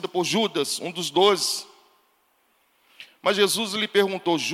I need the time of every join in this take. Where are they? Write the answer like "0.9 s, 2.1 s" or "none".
3.1 s